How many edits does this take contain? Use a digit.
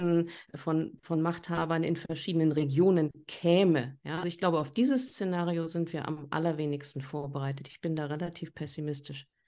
1